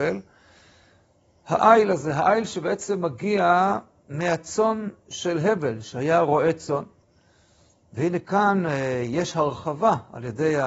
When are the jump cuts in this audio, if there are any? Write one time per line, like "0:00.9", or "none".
none